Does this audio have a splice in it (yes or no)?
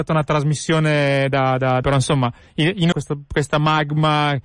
yes